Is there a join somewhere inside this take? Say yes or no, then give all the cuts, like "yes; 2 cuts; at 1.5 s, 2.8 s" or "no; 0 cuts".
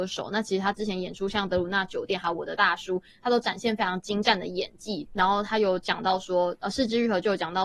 yes; 1 cut; at 5.1 s